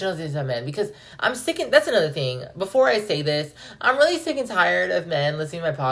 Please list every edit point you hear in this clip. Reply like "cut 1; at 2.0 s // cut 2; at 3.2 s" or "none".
none